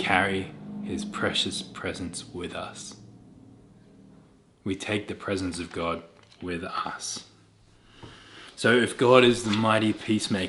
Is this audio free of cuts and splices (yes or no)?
yes